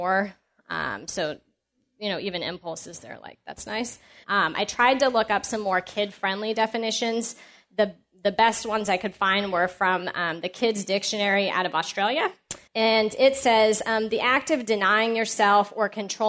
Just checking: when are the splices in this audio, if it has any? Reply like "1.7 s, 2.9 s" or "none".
4.2 s, 12.7 s